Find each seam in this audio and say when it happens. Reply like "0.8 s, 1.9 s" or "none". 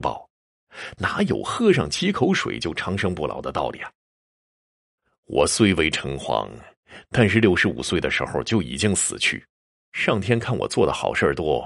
none